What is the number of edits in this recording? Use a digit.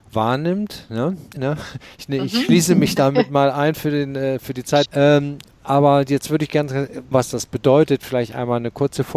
3